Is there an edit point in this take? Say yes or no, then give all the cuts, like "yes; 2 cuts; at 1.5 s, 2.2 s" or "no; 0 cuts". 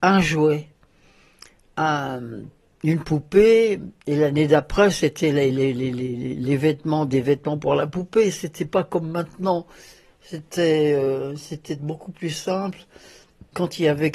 no; 0 cuts